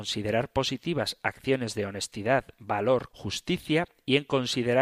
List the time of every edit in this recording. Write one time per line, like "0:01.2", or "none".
0:03.1